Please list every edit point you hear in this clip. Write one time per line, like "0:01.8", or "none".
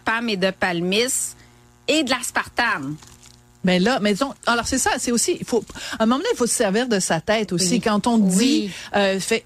none